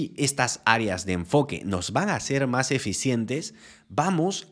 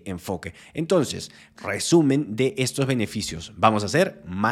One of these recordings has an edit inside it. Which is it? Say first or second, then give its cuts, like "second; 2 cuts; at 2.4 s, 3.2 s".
second; 1 cut; at 1.5 s